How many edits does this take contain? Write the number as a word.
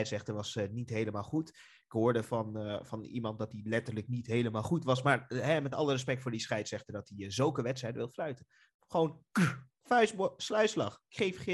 one